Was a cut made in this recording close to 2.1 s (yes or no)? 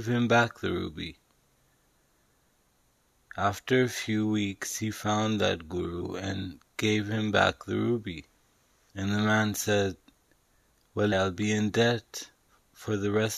no